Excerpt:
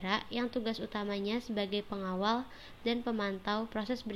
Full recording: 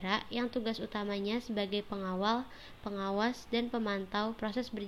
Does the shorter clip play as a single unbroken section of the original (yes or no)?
no